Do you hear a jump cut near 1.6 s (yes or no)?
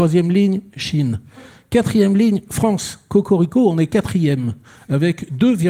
no